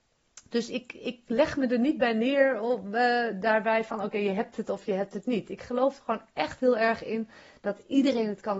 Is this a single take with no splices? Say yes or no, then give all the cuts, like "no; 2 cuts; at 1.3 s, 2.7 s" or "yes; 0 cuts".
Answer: yes; 0 cuts